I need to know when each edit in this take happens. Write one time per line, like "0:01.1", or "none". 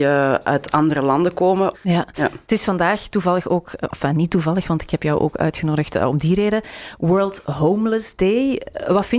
0:01.7